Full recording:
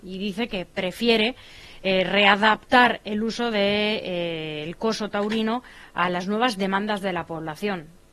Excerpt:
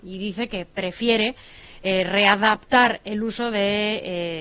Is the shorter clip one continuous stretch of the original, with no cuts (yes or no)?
yes